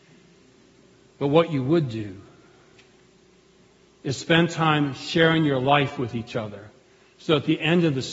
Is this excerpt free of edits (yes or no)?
yes